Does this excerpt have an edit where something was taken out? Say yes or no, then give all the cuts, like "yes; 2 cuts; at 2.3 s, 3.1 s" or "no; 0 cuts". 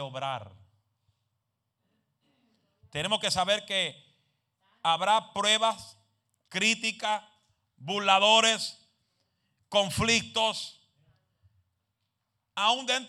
yes; 1 cut; at 6.5 s